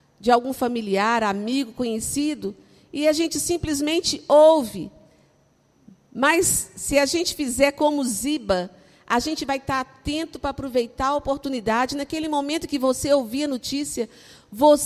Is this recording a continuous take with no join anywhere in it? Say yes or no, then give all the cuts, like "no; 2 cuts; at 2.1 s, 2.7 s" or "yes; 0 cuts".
yes; 0 cuts